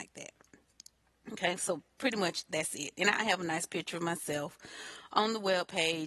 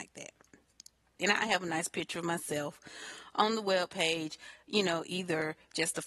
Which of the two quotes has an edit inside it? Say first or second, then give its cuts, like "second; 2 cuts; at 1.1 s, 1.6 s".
second; 1 cut; at 1.2 s